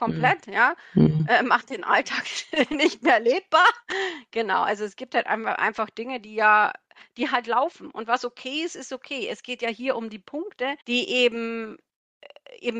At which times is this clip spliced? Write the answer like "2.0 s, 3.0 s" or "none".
10.8 s